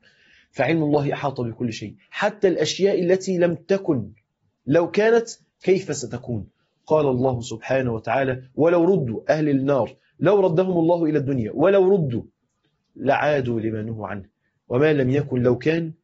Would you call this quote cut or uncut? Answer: uncut